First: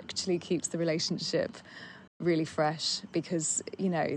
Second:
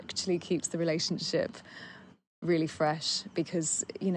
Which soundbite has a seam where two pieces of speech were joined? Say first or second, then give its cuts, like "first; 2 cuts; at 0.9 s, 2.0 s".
first; 1 cut; at 2.1 s